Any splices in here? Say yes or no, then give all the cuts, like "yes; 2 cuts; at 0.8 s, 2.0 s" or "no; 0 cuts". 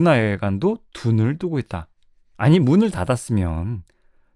no; 0 cuts